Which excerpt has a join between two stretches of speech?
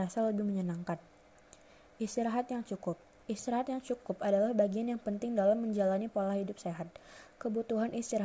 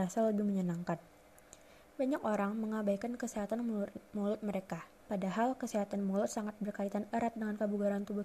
second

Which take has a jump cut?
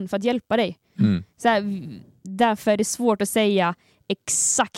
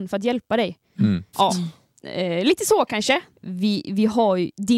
second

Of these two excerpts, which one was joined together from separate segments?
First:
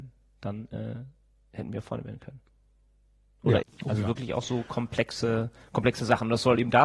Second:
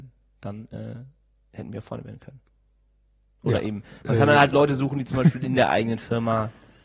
first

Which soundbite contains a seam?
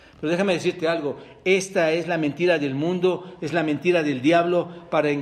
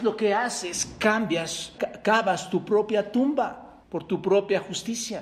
second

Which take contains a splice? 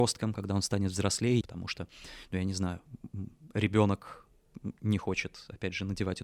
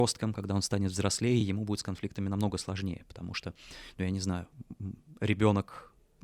first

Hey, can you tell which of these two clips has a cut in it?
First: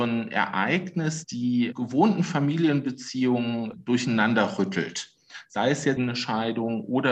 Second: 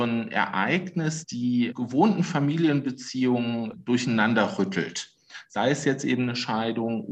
first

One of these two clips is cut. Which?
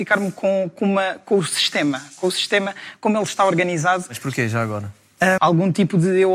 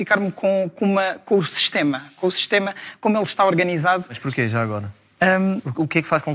first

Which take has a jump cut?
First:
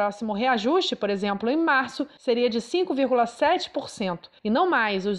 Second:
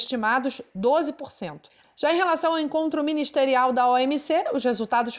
second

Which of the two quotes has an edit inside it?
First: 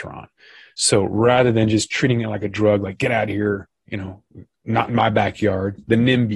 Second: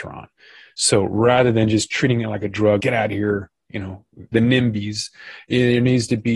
second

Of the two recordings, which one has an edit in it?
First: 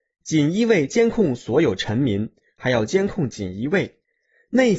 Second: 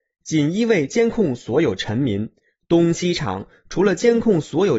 first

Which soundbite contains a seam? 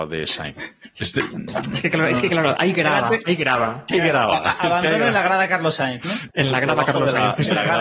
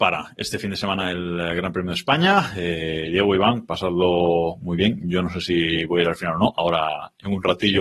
first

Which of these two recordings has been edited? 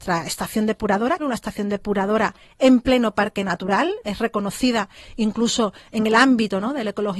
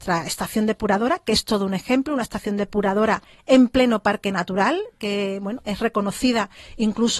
first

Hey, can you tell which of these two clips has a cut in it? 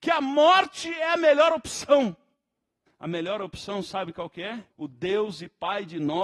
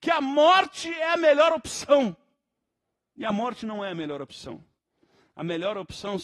first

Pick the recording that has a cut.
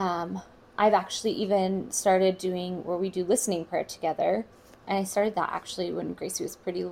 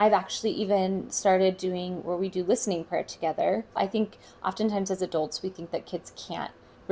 second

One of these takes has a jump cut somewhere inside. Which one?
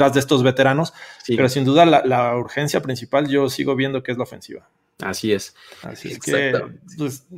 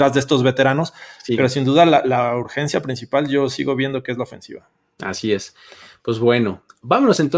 first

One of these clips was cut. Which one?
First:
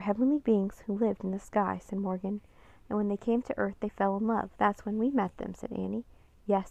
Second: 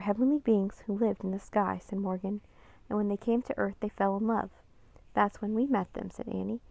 first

